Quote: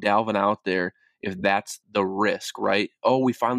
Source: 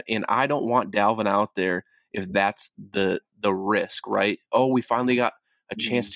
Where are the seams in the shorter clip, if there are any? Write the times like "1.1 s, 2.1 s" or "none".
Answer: 1.8 s